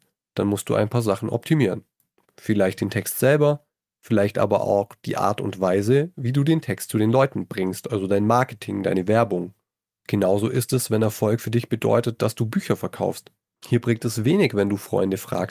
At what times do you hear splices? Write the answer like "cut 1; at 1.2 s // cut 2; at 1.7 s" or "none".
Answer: cut 1; at 13.5 s